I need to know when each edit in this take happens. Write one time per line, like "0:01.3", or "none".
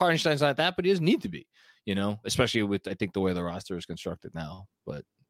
0:02.2